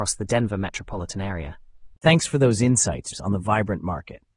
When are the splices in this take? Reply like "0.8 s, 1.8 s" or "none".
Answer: 2.0 s, 3.1 s